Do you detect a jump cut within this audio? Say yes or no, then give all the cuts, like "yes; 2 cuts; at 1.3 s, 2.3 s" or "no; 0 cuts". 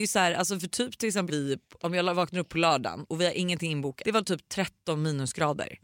yes; 2 cuts; at 1.3 s, 4.0 s